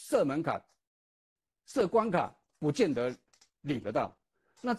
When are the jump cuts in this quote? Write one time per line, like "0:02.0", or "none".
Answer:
0:02.5